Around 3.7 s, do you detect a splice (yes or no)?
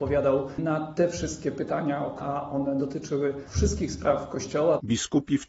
no